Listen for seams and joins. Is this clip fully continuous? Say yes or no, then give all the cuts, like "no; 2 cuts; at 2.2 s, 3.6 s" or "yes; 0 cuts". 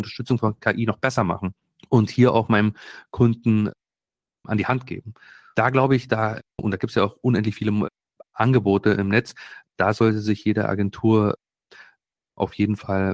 no; 1 cut; at 6.6 s